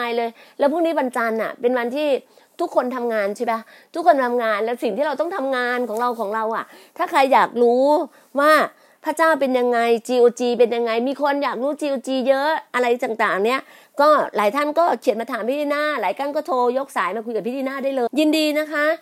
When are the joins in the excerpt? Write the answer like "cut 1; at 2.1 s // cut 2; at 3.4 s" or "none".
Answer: cut 1; at 18.1 s